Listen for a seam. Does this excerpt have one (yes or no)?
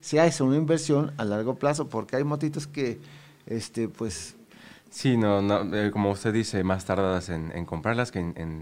no